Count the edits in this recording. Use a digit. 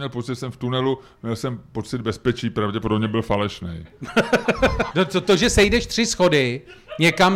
1